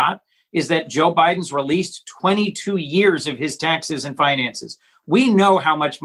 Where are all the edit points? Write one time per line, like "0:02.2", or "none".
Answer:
none